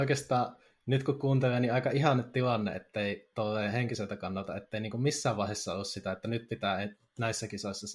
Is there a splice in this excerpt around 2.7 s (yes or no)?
no